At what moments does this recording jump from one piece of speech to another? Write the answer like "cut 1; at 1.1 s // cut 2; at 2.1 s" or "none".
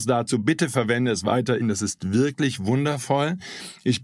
cut 1; at 1.6 s